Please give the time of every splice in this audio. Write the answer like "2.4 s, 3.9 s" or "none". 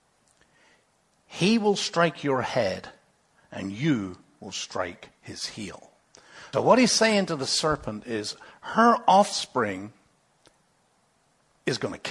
6.5 s